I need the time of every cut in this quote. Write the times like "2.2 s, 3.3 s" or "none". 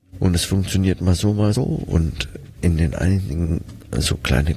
1.5 s